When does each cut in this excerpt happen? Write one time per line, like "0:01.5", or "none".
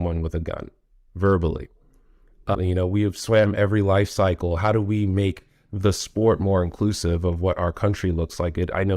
0:02.5